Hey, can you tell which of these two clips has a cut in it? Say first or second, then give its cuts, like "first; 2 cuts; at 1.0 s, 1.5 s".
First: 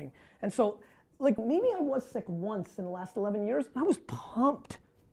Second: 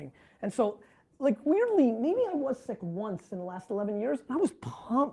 first; 1 cut; at 1.4 s